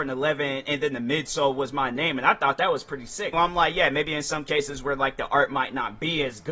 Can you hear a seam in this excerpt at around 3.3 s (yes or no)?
yes